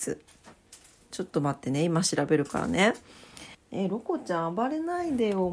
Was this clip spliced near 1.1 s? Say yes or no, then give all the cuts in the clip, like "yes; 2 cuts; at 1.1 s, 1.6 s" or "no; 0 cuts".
no; 1 cut; at 3.5 s